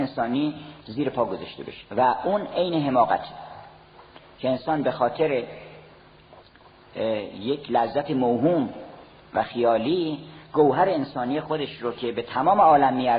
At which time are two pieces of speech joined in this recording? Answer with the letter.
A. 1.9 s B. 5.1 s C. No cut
A